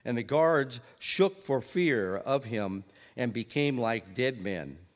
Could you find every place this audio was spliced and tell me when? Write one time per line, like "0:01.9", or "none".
none